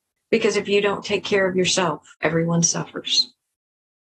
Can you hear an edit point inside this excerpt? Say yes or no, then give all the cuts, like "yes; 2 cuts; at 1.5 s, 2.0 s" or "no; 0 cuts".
yes; 1 cut; at 2.1 s